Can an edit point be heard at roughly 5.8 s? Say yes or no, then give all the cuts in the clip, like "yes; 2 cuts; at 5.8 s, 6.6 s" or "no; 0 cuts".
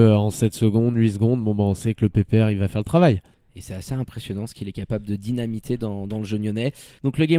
no; 0 cuts